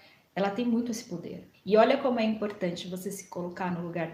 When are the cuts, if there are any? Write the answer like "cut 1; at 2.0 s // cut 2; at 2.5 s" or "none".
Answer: cut 1; at 1.5 s